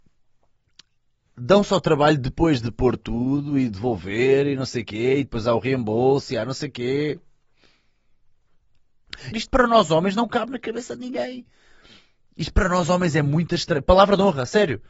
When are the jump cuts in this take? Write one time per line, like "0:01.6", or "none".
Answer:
0:09.3